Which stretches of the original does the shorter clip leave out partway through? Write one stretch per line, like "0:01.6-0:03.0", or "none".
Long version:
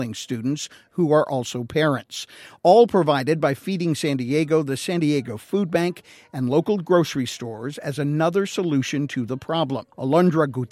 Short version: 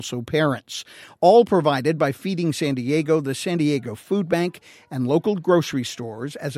none